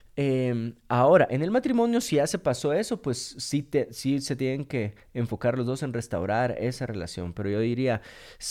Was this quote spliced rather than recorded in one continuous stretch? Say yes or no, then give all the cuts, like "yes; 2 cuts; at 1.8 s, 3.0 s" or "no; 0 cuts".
no; 0 cuts